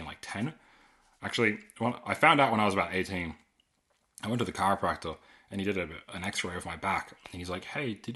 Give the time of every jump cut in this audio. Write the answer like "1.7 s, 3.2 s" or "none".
none